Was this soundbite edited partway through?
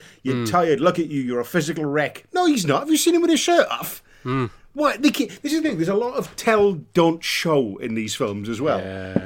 no; 0 cuts

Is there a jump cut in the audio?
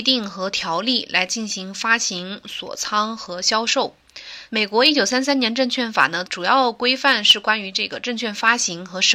yes; 2 cuts; at 4.5 s, 6.3 s

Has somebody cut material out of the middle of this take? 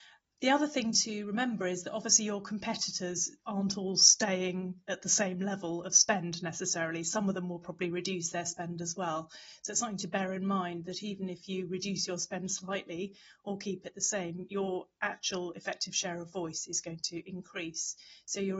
no; 0 cuts

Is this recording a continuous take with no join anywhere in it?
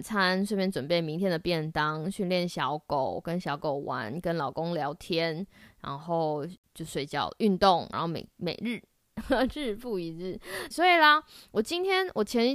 no; 2 cuts; at 7.9 s, 10.7 s

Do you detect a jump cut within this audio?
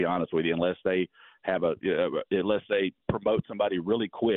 no; 0 cuts

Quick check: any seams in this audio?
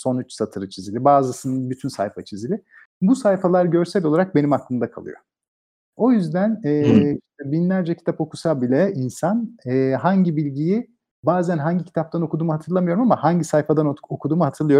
no; 0 cuts

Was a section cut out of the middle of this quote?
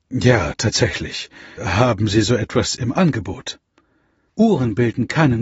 yes; 2 cuts; at 1.6 s, 4.3 s

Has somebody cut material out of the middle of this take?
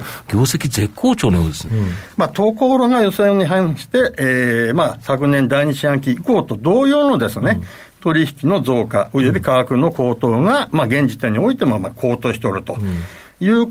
yes; 1 cut; at 1.7 s

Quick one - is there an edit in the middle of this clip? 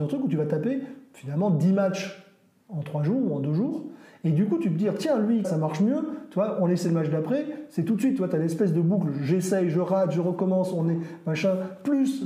yes; 1 cut; at 5.4 s

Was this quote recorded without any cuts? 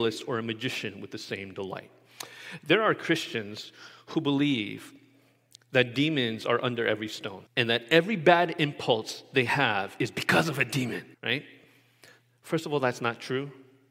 no; 2 cuts; at 7.5 s, 11.1 s

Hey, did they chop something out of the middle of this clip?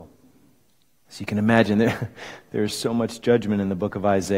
yes; 1 cut; at 1.1 s

